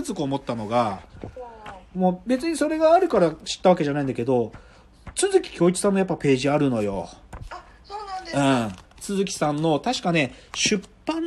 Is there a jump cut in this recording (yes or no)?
no